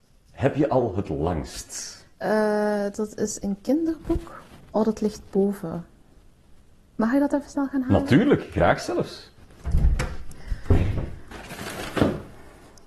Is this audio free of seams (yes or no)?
yes